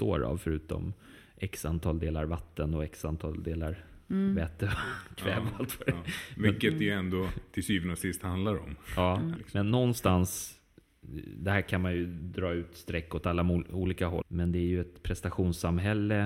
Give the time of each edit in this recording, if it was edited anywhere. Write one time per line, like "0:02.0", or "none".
0:09.4
0:14.2